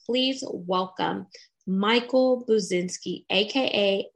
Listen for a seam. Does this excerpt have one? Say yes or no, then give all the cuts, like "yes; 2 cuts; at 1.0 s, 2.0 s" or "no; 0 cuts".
no; 0 cuts